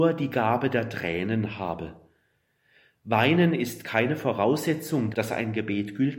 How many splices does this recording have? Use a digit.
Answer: 1